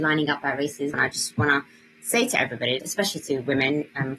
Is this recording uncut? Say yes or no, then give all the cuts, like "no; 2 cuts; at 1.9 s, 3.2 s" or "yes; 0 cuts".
no; 2 cuts; at 0.9 s, 2.8 s